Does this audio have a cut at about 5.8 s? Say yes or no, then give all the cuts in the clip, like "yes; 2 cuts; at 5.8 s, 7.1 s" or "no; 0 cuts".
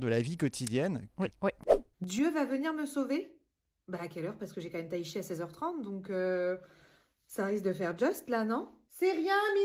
no; 1 cut; at 1.3 s